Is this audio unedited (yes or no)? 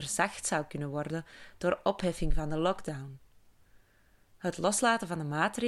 yes